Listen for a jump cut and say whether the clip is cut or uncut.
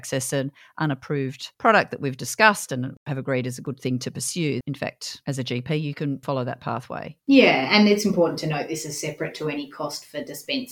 cut